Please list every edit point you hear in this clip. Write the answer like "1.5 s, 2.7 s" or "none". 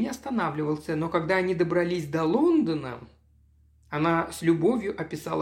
none